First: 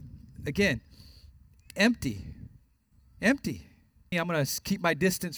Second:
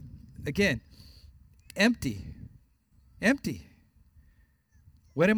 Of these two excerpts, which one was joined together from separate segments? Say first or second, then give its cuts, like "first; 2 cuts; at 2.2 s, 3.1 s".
first; 1 cut; at 4.1 s